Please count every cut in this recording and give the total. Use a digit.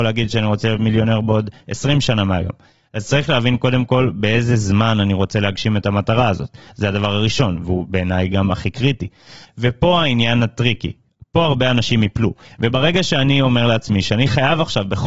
2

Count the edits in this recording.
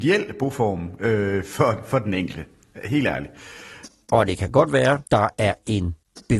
1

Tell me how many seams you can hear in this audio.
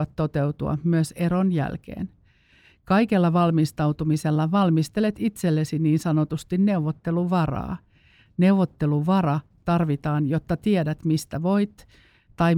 0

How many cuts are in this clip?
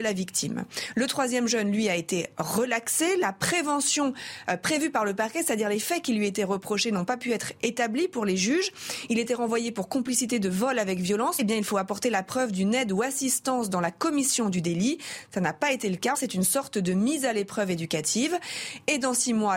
2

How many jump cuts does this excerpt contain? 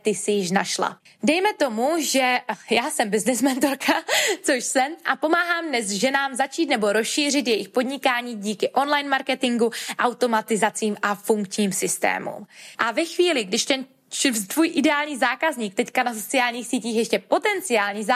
2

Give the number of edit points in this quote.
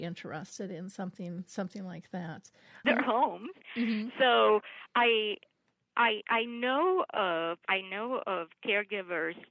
2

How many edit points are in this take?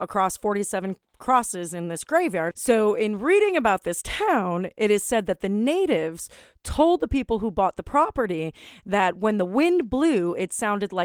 1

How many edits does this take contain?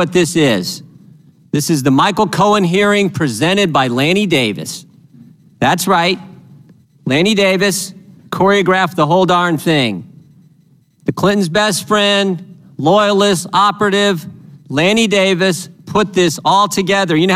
0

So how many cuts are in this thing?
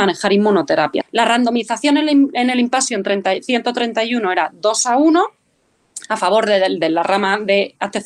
1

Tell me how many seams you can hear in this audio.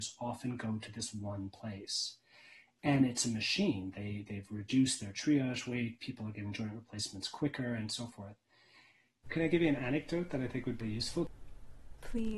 2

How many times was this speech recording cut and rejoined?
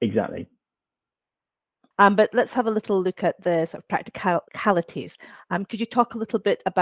1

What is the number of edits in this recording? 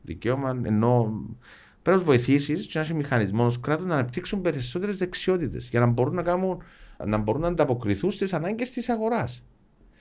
1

